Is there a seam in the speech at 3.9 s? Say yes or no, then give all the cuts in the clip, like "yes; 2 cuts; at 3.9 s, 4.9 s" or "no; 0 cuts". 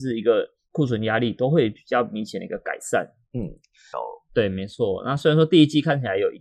yes; 1 cut; at 3.9 s